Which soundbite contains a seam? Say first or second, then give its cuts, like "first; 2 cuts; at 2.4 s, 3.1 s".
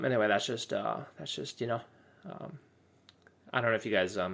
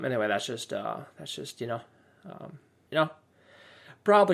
second; 1 cut; at 2.9 s